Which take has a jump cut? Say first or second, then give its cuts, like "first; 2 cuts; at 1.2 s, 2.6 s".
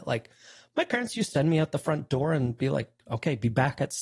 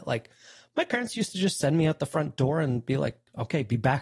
first; 1 cut; at 1.3 s